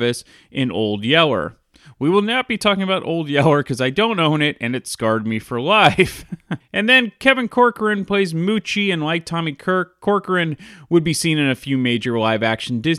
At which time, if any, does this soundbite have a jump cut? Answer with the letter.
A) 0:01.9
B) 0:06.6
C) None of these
B